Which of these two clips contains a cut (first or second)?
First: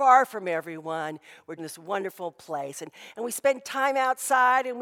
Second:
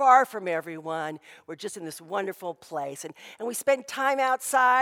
first